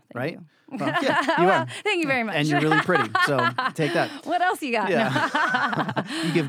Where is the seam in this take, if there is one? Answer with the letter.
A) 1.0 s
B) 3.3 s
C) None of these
C